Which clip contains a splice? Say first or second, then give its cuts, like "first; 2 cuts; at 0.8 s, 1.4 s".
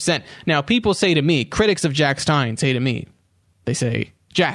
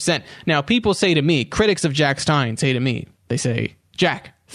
second; 1 cut; at 3.1 s